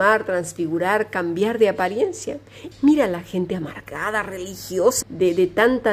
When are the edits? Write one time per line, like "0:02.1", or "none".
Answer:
0:02.7
0:05.0